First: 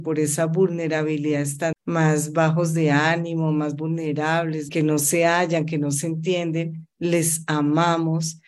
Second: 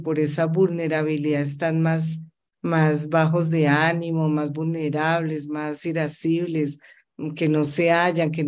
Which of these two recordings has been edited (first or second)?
first